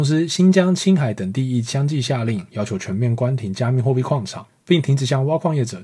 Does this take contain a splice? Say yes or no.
no